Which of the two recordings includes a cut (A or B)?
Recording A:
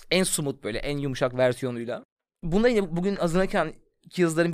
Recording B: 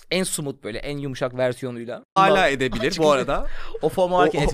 B